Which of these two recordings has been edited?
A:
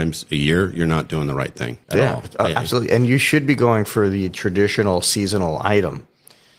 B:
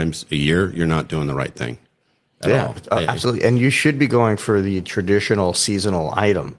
A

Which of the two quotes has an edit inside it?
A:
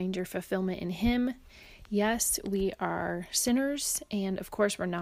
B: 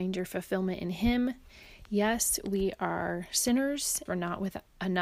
B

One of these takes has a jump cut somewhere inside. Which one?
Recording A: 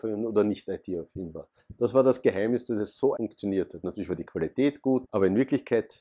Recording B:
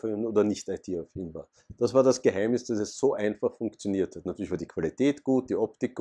A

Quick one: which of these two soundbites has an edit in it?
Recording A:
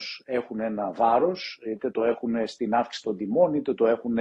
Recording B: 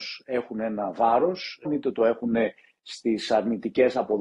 B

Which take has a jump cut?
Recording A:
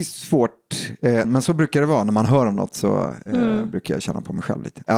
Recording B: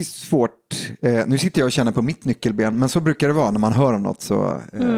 A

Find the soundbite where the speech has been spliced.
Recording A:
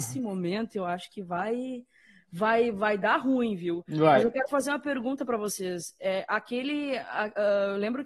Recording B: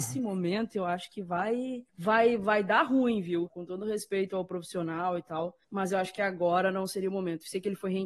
B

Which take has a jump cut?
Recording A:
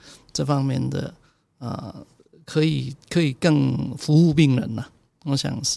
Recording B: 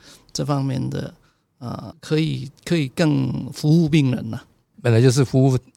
B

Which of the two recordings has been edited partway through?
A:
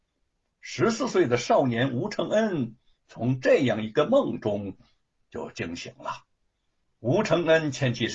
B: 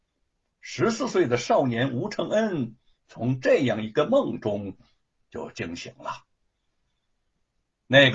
A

